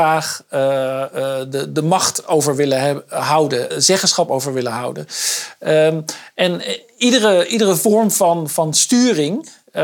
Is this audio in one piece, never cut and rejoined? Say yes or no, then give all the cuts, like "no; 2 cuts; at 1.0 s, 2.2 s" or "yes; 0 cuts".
no; 2 cuts; at 3.7 s, 7.5 s